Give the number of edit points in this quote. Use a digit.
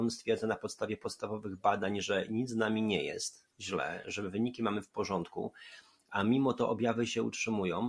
0